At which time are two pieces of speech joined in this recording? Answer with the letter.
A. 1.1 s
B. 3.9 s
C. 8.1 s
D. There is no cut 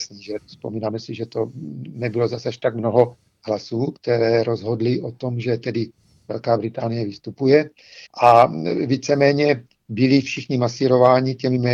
C